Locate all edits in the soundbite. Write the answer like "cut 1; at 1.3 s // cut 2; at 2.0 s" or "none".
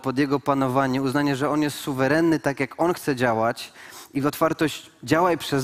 none